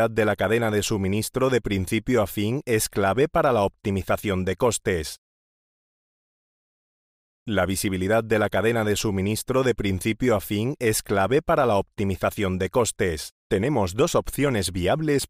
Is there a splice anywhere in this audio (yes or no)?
yes